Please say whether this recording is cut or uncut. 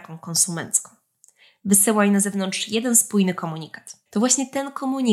cut